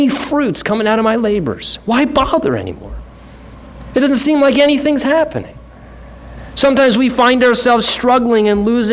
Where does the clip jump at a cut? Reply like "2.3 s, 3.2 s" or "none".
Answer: none